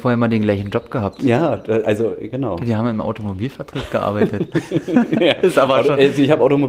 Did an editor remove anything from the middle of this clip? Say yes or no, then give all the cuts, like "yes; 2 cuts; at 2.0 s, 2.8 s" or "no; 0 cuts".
no; 0 cuts